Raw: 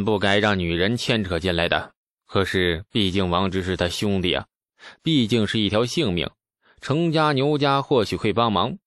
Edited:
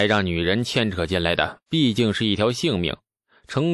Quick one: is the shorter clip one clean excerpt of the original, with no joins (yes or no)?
no